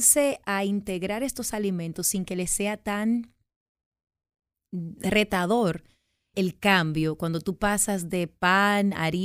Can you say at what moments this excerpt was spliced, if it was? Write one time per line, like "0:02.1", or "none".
0:06.3

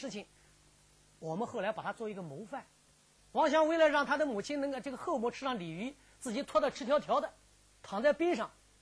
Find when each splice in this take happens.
0:03.2

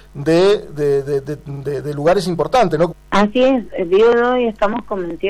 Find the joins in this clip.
0:02.9

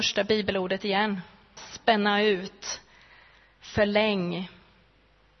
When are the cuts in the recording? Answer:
0:01.6

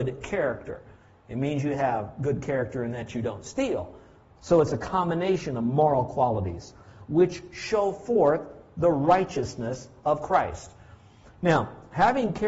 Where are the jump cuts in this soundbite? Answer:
0:04.4

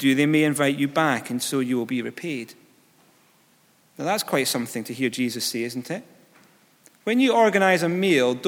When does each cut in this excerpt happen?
none

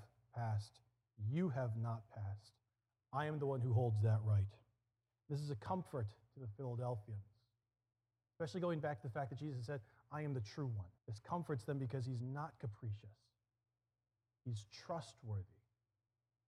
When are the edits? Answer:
0:11.0

